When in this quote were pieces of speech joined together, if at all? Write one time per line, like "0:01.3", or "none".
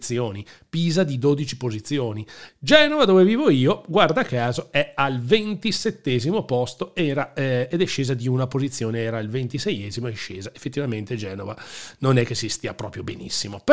0:02.5